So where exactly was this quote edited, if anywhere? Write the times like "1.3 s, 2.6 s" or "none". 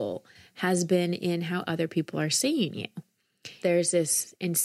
3.6 s